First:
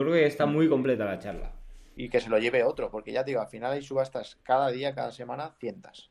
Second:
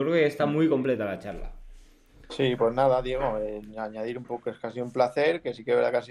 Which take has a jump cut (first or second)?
first